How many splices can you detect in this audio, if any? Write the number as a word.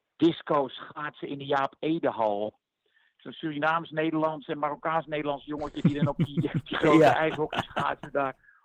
zero